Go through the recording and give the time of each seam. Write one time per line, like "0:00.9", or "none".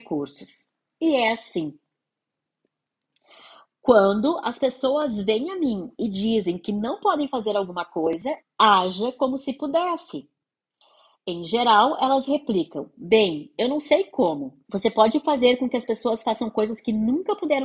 0:08.4
0:14.6